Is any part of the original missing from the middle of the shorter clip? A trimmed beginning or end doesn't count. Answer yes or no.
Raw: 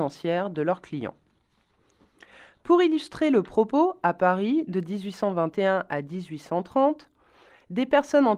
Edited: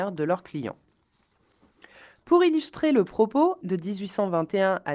yes